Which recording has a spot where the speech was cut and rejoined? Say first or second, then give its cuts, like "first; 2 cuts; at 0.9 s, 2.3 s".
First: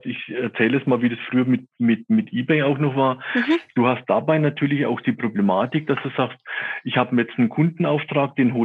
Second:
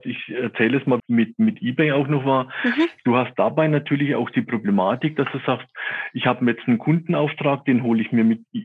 second; 1 cut; at 1.0 s